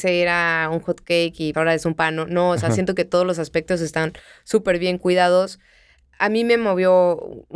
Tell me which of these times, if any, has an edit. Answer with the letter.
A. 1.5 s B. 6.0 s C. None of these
A